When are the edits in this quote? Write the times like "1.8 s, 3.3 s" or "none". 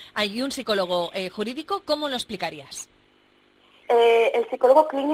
3.8 s